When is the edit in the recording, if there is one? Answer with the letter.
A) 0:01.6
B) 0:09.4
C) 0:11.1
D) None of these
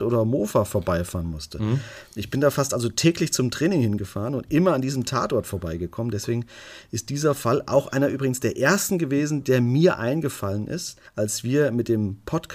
C